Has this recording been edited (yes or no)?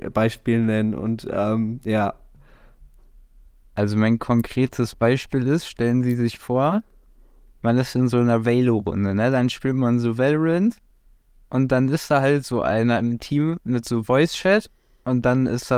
no